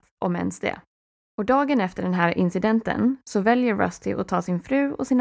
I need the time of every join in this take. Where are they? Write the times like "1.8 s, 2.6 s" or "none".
1.2 s